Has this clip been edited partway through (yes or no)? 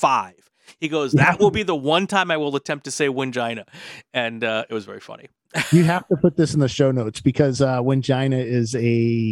no